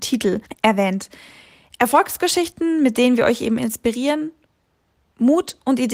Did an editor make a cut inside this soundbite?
no; 0 cuts

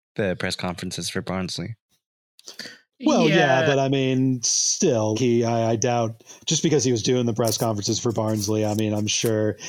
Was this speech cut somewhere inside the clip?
yes; 1 cut; at 5.1 s

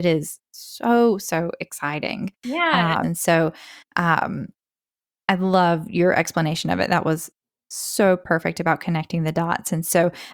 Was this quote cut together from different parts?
yes; 1 cut; at 3.0 s

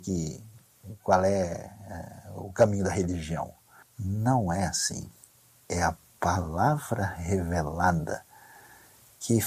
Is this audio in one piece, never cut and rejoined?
no; 1 cut; at 3.8 s

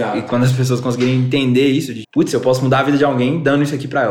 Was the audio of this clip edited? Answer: yes; 1 cut; at 2.0 s

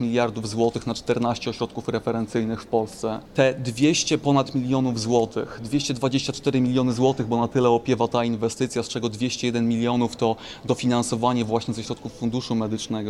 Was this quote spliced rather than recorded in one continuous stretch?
no; 0 cuts

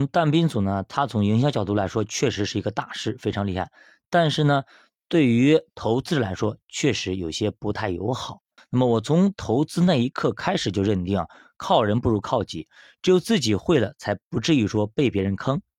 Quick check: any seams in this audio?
yes; 1 cut; at 8.6 s

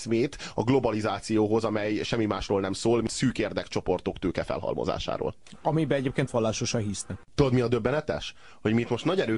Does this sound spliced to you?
no; 0 cuts

